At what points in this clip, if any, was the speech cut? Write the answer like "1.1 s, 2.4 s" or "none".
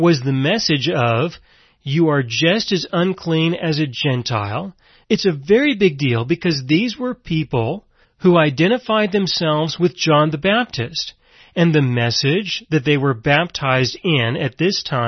5.0 s, 8.0 s